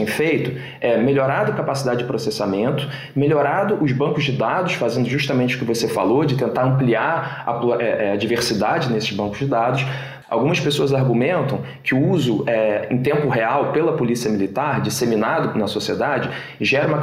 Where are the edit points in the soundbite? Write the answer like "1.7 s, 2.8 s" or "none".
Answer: 10.2 s